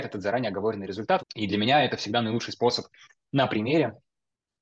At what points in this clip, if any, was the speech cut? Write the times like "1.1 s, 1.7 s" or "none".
1.2 s

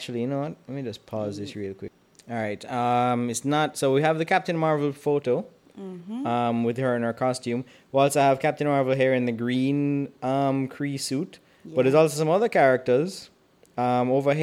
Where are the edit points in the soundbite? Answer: none

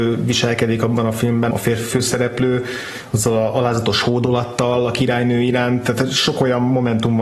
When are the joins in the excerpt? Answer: 1.5 s

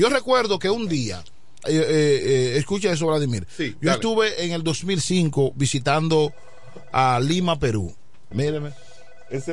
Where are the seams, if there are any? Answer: 1.6 s, 8.3 s

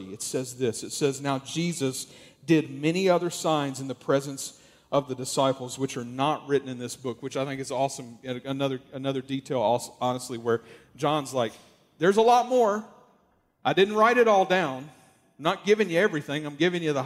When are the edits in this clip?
none

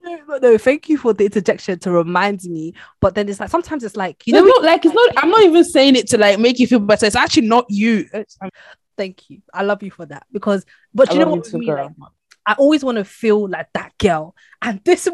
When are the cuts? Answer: 8.5 s

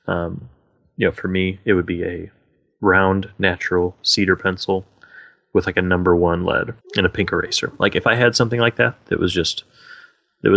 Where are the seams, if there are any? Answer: 6.8 s

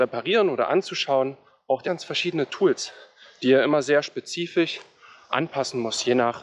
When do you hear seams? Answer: 1.9 s

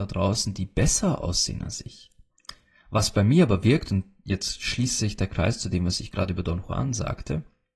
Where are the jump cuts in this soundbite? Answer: none

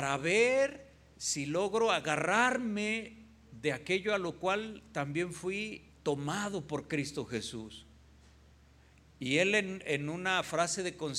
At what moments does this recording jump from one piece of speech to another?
5.9 s

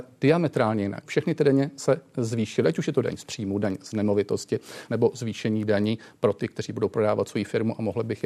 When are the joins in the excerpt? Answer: 1.0 s, 4.9 s

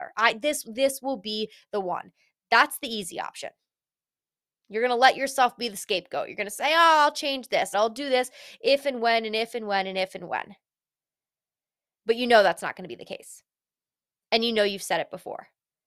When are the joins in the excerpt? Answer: 7.7 s

